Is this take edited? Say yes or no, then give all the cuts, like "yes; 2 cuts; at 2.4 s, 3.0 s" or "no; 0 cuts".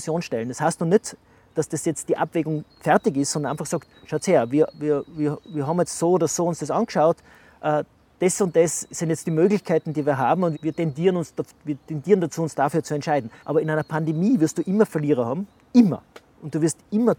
yes; 2 cuts; at 10.5 s, 13.4 s